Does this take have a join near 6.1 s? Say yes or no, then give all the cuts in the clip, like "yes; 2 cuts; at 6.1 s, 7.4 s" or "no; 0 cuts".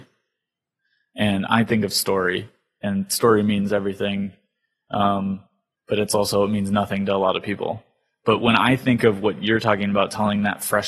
no; 0 cuts